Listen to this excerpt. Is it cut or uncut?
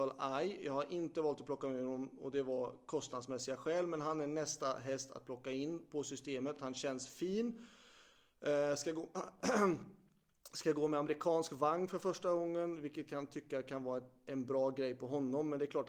uncut